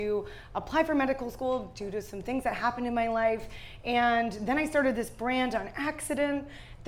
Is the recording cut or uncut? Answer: uncut